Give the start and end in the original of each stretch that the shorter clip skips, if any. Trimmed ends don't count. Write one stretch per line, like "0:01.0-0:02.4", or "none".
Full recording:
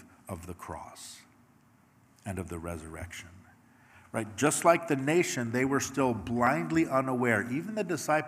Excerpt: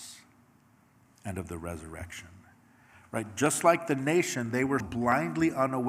0:05.8-0:06.1